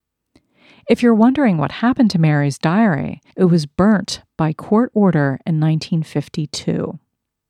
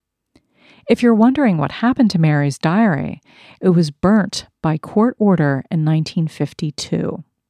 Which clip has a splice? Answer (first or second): first